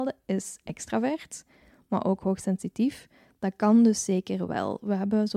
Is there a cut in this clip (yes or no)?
no